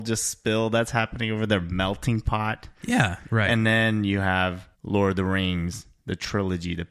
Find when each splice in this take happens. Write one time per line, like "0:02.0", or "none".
0:03.2
0:04.7